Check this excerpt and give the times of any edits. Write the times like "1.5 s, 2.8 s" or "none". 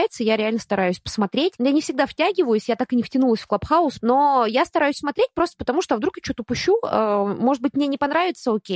4.0 s